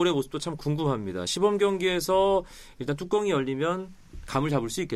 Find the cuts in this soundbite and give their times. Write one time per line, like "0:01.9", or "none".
none